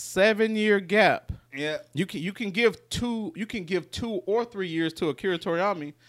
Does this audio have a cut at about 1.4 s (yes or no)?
no